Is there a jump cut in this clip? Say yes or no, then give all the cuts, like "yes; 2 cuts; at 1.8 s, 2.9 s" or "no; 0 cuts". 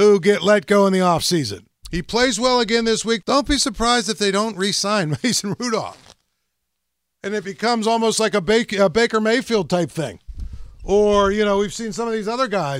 yes; 2 cuts; at 1.8 s, 3.2 s